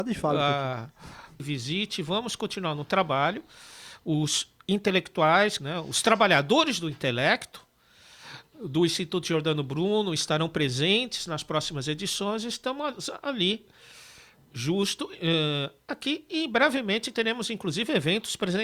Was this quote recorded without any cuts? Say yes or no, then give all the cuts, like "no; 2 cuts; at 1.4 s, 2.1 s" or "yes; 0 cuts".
no; 2 cuts; at 1.4 s, 5.6 s